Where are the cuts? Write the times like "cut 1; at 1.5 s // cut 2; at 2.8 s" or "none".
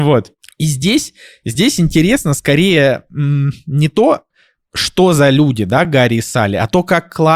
none